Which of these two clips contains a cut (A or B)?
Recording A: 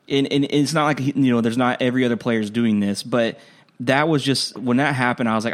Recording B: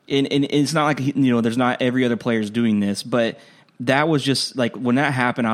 A